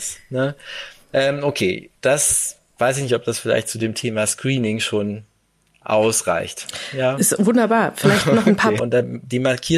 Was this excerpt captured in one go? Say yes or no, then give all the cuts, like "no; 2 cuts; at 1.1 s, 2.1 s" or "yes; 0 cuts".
no; 1 cut; at 8.8 s